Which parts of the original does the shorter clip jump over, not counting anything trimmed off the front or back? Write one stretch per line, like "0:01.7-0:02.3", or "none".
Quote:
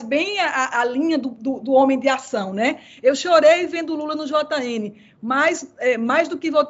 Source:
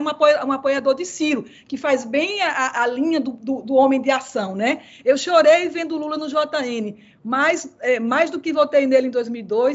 none